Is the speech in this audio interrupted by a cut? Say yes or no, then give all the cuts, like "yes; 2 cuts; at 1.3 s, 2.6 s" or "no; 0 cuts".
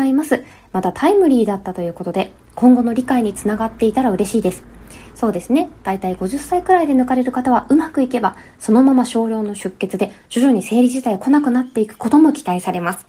no; 0 cuts